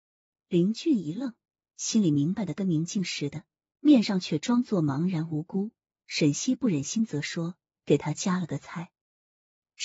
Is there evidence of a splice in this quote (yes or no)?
no